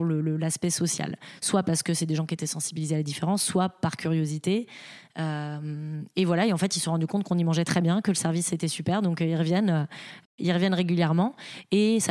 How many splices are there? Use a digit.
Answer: 0